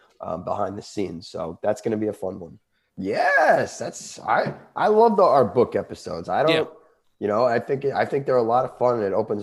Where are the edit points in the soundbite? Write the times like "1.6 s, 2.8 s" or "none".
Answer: 2.9 s